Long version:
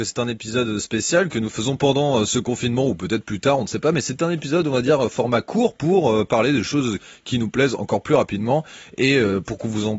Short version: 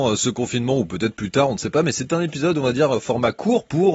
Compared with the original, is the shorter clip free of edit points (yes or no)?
yes